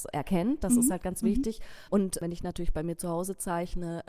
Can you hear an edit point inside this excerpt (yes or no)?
yes